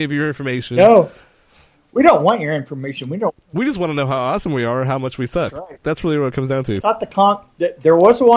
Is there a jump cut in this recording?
no; 0 cuts

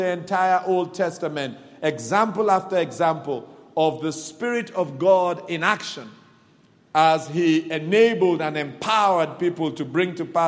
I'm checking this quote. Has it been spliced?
no; 0 cuts

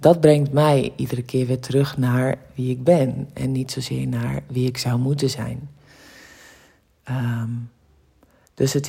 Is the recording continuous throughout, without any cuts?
yes; 0 cuts

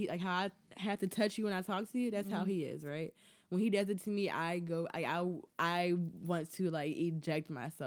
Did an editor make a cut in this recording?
no; 0 cuts

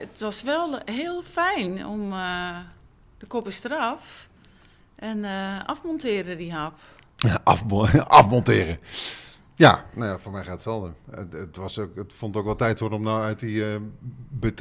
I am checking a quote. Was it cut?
no; 0 cuts

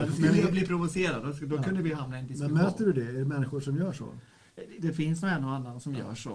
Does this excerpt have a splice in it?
no; 0 cuts

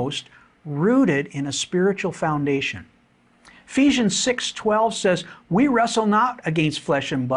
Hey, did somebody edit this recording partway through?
no; 0 cuts

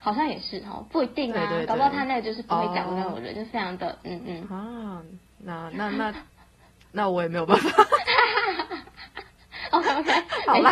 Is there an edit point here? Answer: yes; 1 cut; at 4.0 s

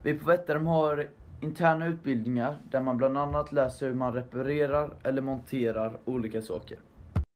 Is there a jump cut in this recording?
no; 0 cuts

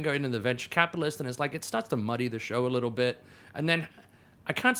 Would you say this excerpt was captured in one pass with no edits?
yes; 0 cuts

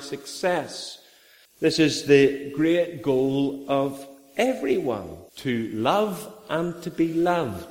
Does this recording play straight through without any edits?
no; 2 cuts; at 1.5 s, 5.3 s

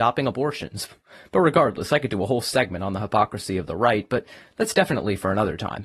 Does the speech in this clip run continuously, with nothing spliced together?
yes; 0 cuts

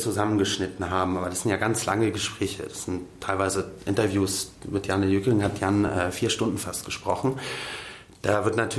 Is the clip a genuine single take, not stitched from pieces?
yes; 0 cuts

